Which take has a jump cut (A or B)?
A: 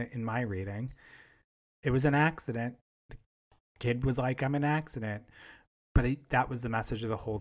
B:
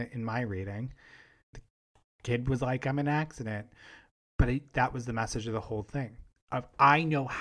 B